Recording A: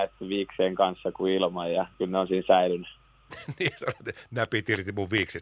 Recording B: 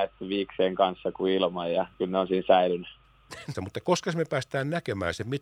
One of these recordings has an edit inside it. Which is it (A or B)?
B